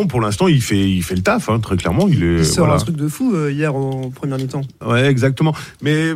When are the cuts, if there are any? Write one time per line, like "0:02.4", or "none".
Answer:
0:04.8